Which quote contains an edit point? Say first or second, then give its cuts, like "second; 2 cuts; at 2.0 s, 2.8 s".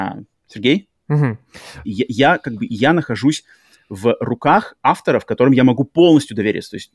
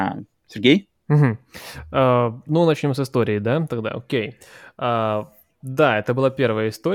first; 1 cut; at 1.8 s